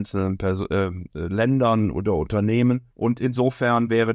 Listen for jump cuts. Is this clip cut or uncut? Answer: cut